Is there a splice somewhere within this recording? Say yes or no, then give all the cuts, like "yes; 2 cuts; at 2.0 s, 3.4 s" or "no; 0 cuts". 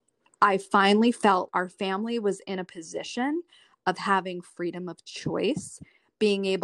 yes; 1 cut; at 1.5 s